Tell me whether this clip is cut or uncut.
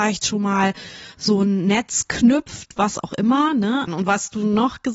cut